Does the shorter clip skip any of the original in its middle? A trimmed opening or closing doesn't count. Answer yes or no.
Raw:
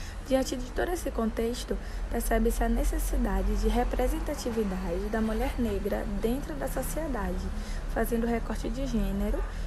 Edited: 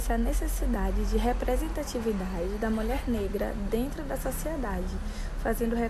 no